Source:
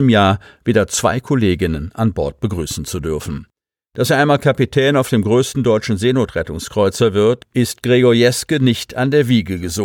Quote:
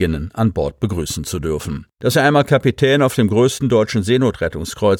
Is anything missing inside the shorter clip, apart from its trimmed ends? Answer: yes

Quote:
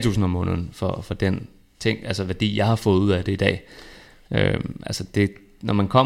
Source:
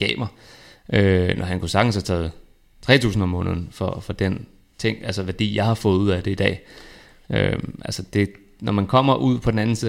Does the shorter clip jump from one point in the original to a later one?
no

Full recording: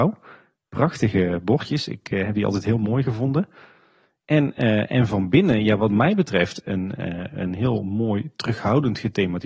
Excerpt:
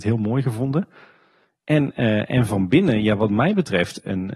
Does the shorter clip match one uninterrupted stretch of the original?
yes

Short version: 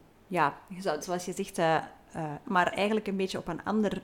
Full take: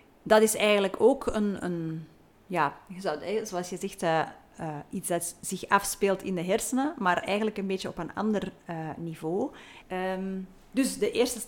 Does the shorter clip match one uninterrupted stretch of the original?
no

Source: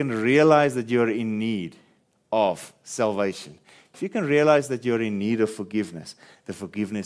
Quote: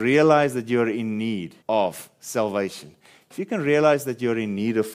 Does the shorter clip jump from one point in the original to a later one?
yes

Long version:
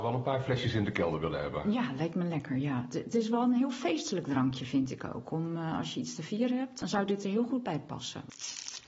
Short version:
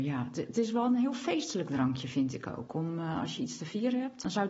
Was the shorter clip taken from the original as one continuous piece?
yes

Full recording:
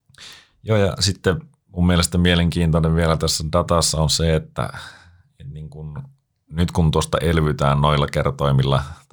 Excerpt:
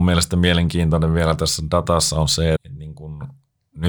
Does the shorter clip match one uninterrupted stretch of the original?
no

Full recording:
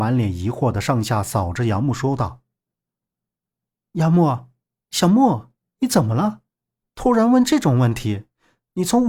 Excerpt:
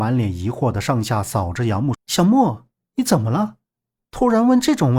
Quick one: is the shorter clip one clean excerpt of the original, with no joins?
no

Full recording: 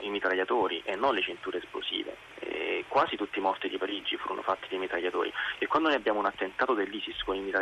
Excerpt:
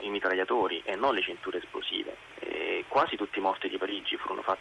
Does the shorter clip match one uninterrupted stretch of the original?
yes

